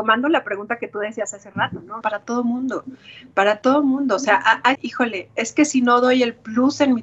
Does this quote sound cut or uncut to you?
cut